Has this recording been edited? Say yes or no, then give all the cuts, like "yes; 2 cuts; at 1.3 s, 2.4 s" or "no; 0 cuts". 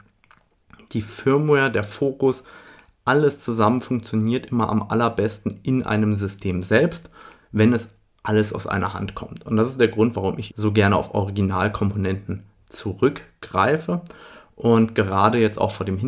yes; 1 cut; at 10.5 s